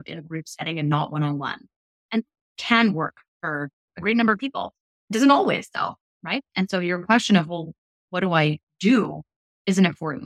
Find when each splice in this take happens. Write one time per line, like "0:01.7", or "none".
none